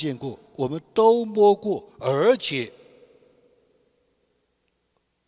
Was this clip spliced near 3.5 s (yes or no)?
no